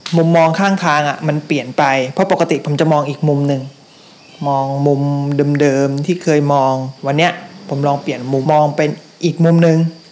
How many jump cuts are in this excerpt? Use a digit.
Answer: 1